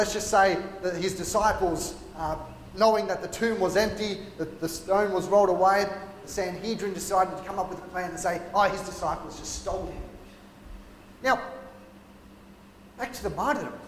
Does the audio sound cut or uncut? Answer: uncut